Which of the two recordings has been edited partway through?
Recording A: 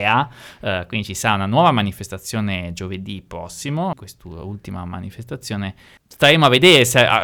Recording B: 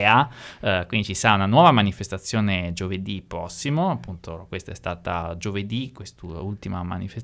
A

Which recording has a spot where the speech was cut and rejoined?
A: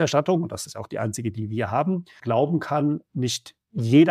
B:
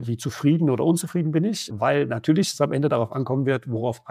B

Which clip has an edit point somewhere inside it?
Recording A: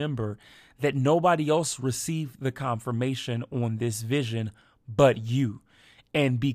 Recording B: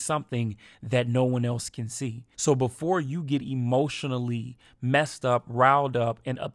B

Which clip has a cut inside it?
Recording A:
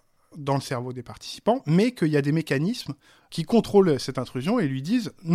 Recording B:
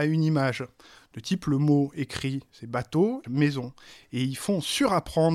B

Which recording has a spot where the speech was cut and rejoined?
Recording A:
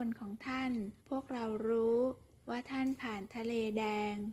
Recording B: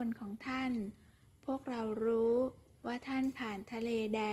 A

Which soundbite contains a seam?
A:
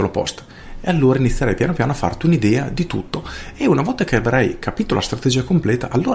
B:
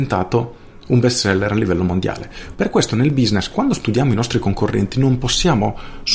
B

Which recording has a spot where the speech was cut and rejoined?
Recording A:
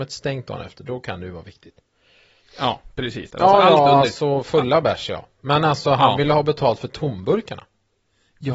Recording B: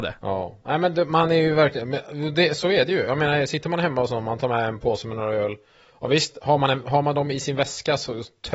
A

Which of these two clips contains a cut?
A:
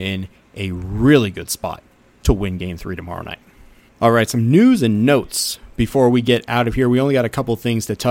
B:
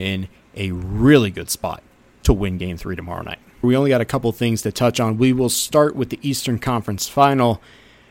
B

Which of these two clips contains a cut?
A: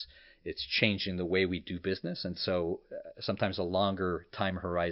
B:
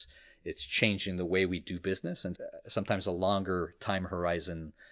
B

